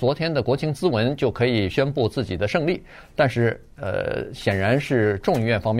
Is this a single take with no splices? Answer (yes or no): yes